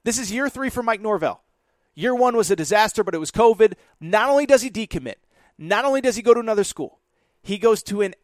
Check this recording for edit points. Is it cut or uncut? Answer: cut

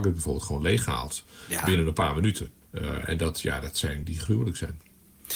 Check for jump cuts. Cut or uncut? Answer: cut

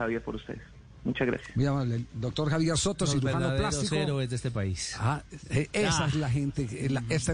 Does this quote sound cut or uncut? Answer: uncut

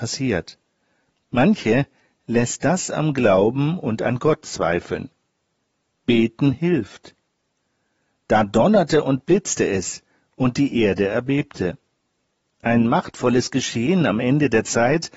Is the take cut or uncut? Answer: uncut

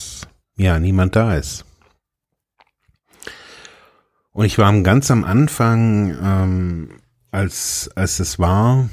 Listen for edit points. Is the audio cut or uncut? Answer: uncut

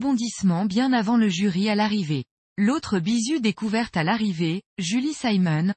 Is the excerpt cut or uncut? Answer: cut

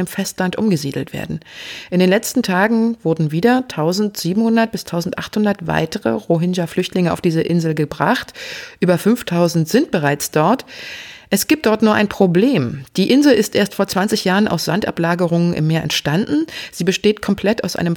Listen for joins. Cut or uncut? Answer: uncut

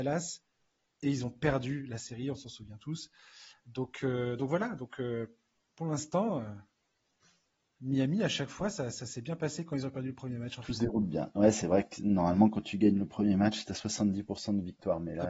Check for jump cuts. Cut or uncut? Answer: uncut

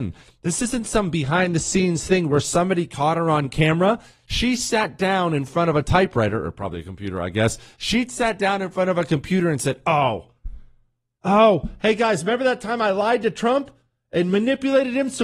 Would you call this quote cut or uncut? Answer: uncut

